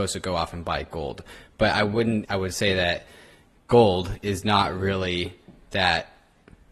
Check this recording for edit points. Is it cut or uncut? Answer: cut